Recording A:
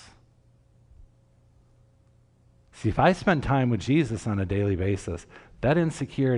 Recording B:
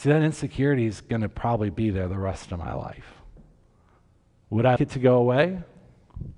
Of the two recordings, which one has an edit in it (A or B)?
B